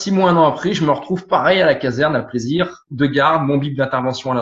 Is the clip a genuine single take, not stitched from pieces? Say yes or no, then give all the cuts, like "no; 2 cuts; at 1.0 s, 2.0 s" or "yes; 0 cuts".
yes; 0 cuts